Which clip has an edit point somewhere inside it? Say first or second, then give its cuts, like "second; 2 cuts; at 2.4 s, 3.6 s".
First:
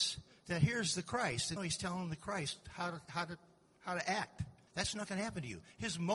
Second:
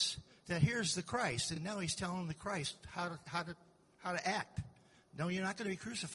first; 2 cuts; at 1.6 s, 4.7 s